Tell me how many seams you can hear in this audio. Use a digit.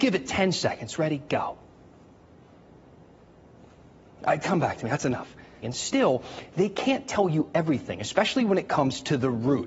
1